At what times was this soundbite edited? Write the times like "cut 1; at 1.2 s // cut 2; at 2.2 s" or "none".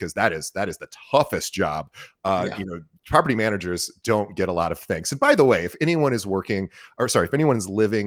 none